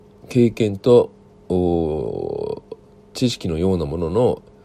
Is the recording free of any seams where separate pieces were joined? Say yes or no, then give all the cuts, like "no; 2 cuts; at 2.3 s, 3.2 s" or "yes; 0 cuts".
yes; 0 cuts